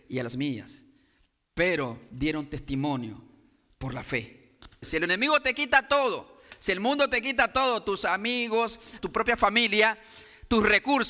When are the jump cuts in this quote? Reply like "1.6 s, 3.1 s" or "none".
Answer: 4.8 s, 9.0 s